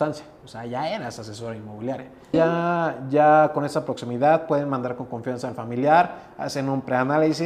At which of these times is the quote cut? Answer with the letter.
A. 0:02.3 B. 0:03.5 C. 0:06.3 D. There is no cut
A